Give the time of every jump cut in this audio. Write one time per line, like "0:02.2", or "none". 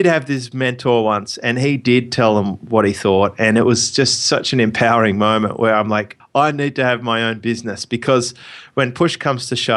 0:06.2